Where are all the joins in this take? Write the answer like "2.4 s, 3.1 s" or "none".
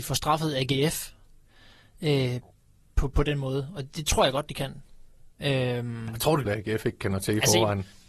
5.4 s, 6.4 s